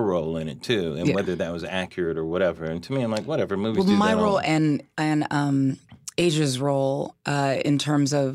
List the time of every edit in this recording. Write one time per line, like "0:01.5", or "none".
none